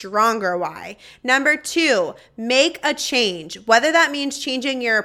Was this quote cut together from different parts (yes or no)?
no